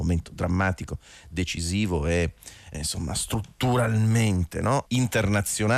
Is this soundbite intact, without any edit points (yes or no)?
no